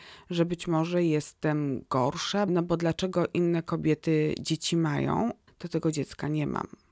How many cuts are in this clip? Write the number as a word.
two